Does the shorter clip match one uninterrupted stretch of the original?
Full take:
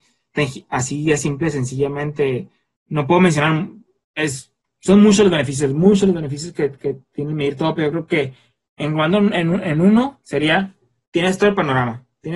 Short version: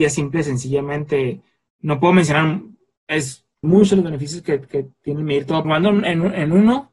no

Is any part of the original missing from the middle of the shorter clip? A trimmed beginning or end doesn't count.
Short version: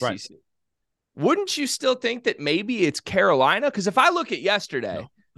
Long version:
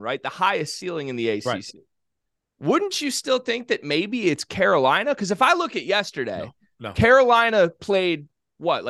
no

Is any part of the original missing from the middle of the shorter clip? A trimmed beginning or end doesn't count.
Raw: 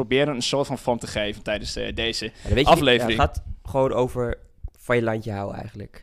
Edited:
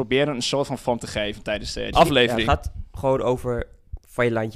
yes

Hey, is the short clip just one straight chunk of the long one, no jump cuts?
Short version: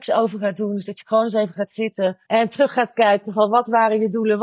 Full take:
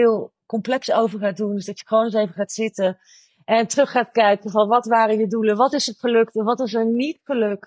no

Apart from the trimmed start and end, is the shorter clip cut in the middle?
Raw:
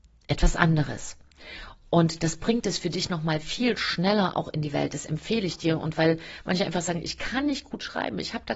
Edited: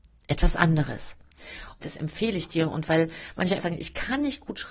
yes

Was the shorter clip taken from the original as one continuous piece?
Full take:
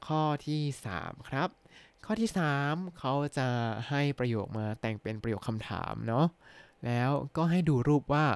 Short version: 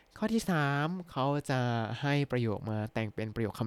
yes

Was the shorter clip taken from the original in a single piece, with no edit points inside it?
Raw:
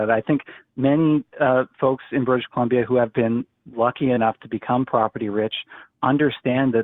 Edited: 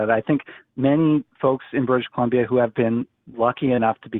no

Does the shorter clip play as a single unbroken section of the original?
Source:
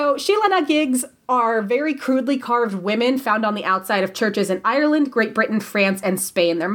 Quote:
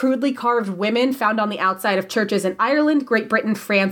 yes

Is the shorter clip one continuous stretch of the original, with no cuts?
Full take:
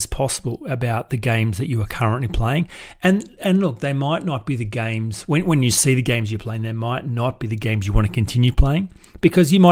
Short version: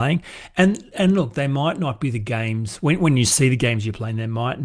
yes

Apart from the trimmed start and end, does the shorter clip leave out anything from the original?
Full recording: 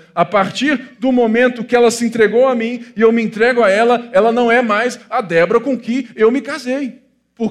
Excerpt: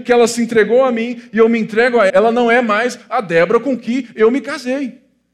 yes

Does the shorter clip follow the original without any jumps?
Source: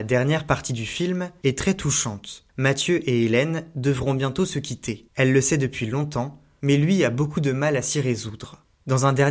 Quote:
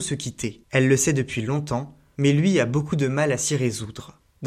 yes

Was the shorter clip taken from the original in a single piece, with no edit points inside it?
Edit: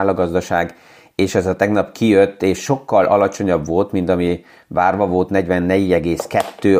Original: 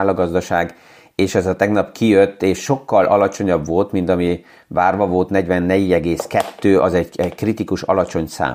yes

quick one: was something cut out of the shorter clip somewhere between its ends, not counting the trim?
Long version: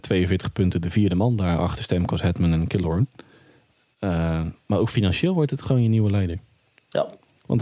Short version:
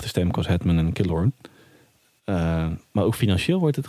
no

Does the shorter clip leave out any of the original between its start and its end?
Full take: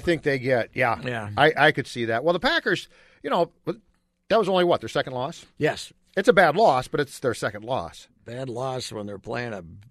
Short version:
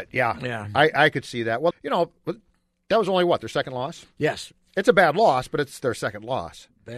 yes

